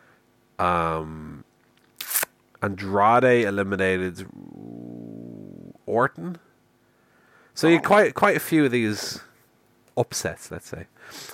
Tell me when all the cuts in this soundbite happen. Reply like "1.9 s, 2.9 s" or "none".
none